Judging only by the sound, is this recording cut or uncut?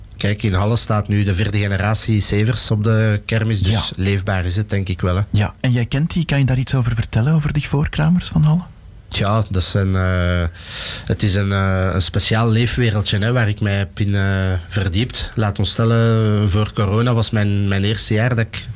uncut